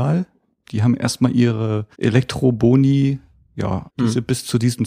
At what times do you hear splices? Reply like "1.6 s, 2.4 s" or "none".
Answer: 1.9 s, 3.9 s